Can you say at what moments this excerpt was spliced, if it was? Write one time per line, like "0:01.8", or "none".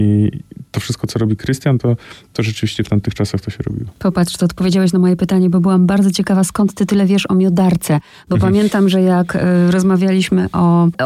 none

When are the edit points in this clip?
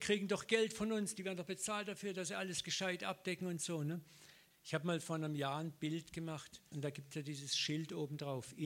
0:04.5
0:06.7

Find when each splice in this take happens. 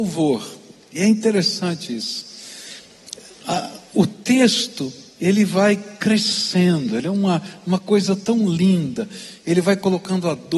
none

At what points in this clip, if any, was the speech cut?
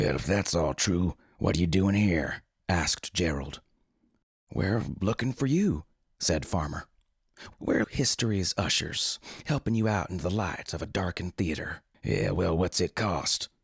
0:07.8
0:11.9

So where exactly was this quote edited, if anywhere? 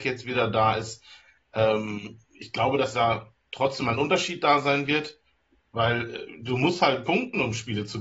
0:05.6

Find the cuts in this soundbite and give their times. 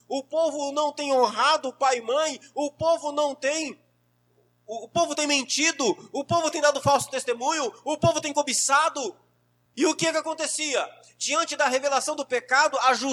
0:09.7

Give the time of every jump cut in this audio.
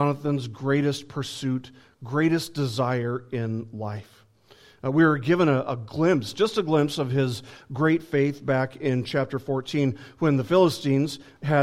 none

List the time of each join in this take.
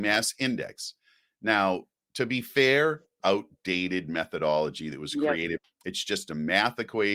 0:03.2
0:05.6

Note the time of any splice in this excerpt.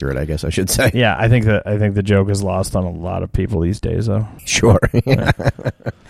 0:04.4

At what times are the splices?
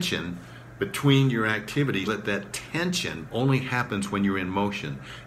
0:02.1
0:03.3

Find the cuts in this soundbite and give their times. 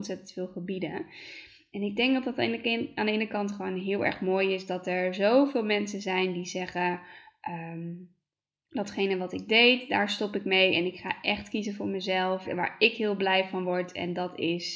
0:12.4

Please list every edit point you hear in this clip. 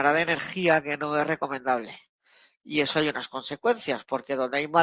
none

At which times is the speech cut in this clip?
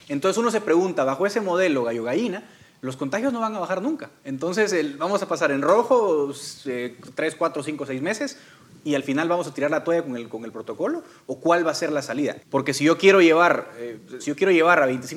0:12.4
0:14.2

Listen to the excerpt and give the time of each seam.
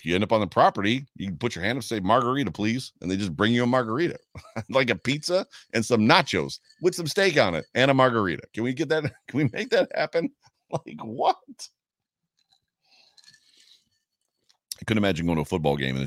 none

